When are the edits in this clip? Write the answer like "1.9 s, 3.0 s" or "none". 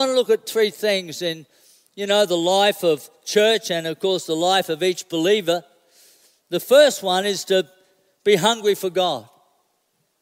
none